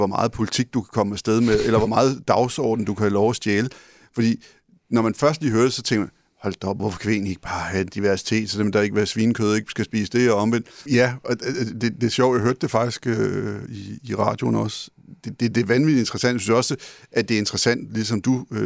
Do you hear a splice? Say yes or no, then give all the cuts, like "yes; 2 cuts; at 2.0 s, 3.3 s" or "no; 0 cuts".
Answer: yes; 2 cuts; at 6.8 s, 10.9 s